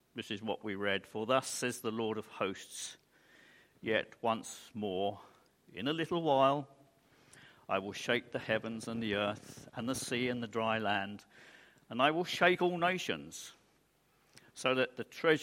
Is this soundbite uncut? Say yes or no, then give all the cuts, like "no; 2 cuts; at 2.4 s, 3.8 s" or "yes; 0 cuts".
yes; 0 cuts